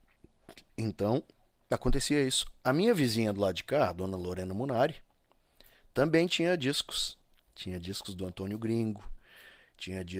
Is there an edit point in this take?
no; 0 cuts

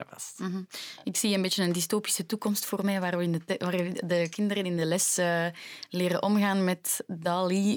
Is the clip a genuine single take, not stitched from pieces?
yes; 0 cuts

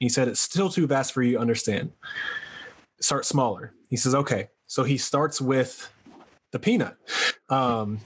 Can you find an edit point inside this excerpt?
no; 0 cuts

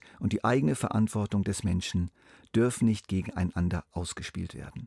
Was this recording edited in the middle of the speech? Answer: no; 0 cuts

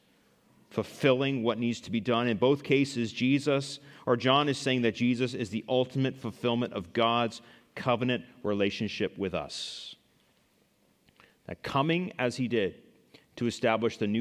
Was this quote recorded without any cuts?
yes; 0 cuts

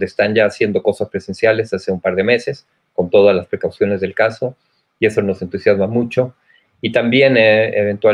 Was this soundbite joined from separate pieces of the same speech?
no; 0 cuts

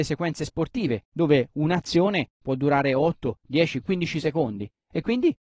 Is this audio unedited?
yes; 0 cuts

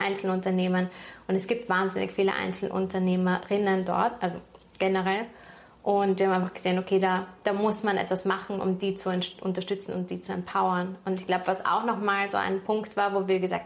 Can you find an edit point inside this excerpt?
no; 0 cuts

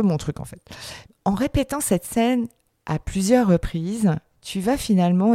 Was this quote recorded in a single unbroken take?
no; 1 cut; at 1.0 s

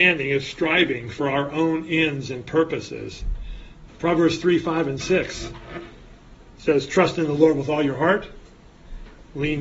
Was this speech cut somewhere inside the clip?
yes; 1 cut; at 3.9 s

